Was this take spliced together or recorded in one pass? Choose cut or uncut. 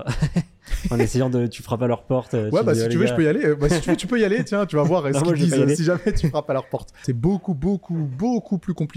uncut